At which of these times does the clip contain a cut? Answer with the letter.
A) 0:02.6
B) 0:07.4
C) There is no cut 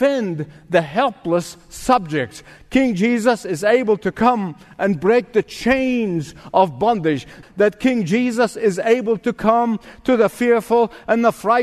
B